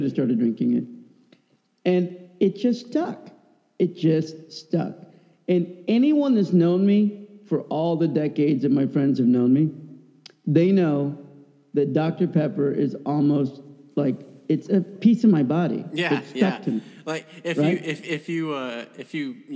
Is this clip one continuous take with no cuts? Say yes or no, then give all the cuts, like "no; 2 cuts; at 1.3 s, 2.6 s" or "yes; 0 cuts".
yes; 0 cuts